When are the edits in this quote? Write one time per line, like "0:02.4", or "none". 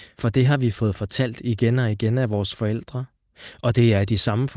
none